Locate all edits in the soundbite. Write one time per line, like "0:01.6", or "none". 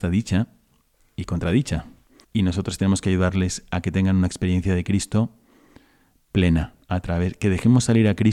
0:02.2
0:06.8